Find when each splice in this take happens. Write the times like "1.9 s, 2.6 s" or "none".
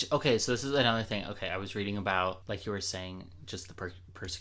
2.4 s

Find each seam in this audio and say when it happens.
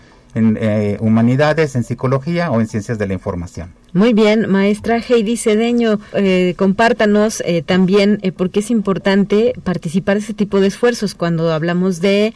6.1 s

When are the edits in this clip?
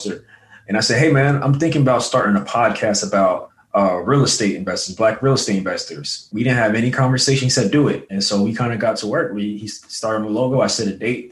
none

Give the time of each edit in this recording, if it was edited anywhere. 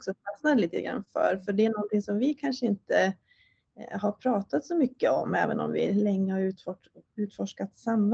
none

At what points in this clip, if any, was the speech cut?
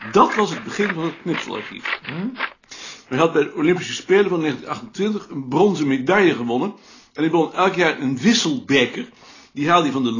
3.0 s

